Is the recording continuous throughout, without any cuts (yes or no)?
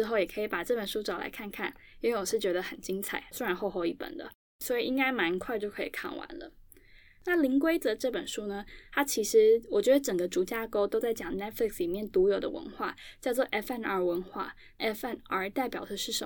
no